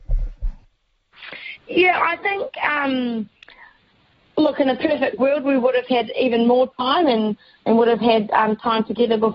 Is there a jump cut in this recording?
no; 0 cuts

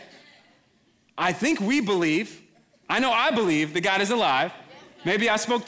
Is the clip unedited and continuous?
yes; 0 cuts

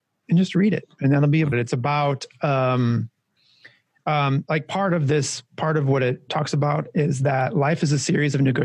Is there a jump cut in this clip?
yes; 2 cuts; at 1.5 s, 6.3 s

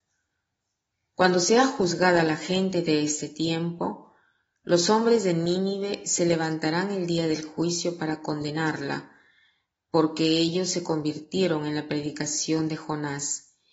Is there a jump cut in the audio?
no; 0 cuts

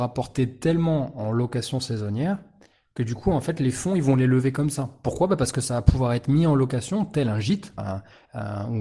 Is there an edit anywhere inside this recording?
yes; 2 cuts; at 5.0 s, 7.8 s

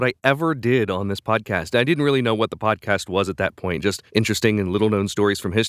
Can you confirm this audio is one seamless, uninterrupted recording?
no; 1 cut; at 4.1 s

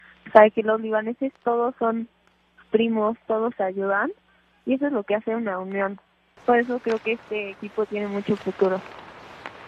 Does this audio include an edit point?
yes; 1 cut; at 6.4 s

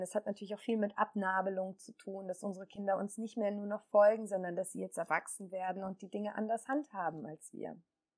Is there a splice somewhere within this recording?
no; 0 cuts

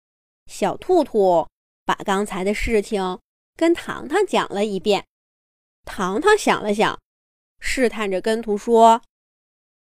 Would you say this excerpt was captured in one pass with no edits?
no; 1 cut; at 8.4 s

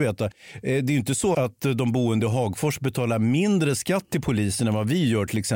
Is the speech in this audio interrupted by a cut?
yes; 1 cut; at 1.3 s

